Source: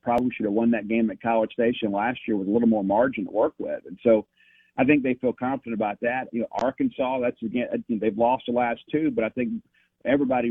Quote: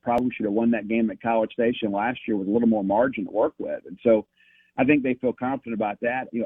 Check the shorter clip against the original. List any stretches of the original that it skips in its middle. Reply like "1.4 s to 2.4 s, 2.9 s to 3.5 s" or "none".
none